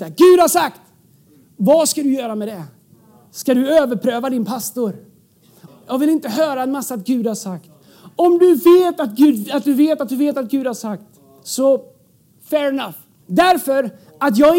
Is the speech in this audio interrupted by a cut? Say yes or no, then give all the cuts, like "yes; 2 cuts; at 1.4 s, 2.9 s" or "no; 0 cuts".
yes; 2 cuts; at 5.7 s, 13.2 s